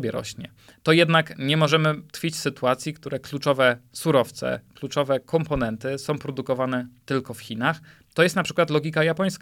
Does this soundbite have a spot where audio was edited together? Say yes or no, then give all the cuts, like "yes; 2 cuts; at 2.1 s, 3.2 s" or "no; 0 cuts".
no; 0 cuts